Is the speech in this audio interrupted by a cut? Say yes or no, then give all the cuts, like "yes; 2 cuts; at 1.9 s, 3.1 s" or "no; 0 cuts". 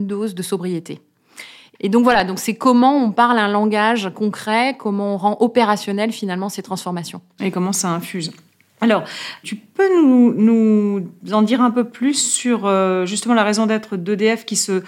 yes; 1 cut; at 1.7 s